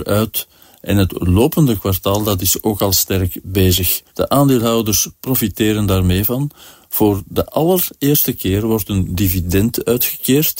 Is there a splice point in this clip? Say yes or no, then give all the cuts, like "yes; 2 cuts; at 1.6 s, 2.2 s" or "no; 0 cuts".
yes; 1 cut; at 4.1 s